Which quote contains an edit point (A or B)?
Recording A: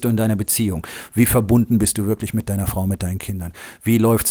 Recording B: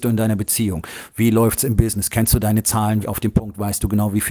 B